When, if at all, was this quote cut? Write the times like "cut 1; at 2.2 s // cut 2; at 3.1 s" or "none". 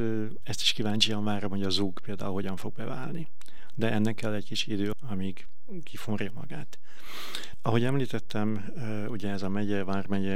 cut 1; at 4.9 s // cut 2; at 7.5 s